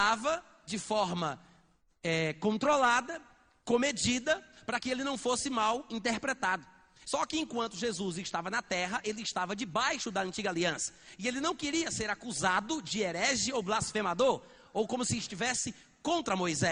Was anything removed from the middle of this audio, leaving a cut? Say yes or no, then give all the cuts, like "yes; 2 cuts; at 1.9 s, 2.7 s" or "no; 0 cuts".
yes; 1 cut; at 7.0 s